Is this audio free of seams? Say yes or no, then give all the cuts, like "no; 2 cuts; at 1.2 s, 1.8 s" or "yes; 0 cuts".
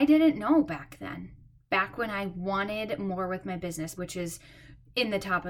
no; 1 cut; at 4.0 s